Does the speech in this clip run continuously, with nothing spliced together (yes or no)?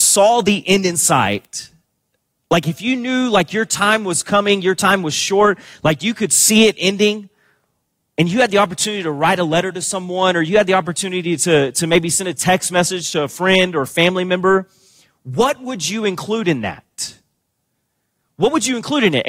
yes